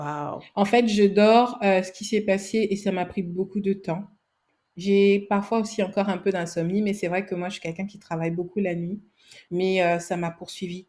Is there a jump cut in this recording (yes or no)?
yes